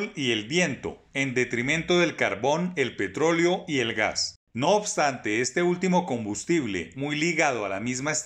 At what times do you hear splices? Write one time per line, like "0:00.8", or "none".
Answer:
none